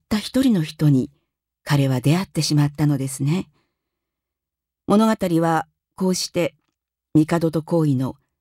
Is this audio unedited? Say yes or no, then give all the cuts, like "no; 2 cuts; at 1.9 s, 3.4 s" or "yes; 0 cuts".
yes; 0 cuts